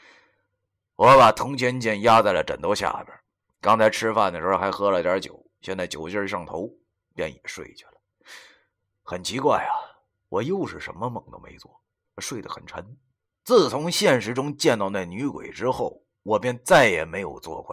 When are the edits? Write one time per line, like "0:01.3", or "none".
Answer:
none